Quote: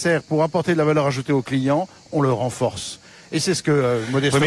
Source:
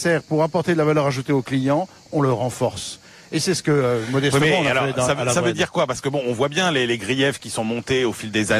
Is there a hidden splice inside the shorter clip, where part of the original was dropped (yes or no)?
no